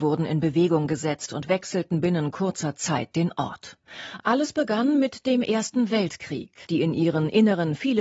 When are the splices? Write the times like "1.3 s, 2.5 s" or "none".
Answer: 4.2 s, 6.6 s